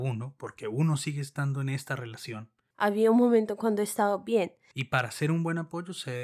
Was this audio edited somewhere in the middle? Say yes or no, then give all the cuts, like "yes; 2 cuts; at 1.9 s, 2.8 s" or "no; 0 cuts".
yes; 2 cuts; at 2.7 s, 4.7 s